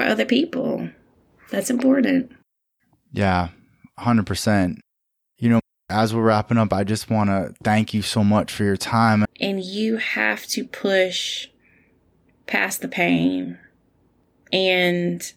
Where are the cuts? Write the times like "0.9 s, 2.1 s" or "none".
9.2 s